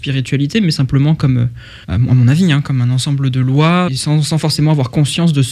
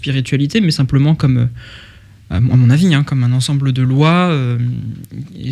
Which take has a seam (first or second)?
first